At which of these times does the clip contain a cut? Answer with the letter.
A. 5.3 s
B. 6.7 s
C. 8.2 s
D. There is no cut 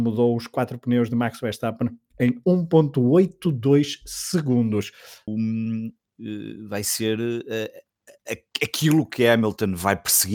A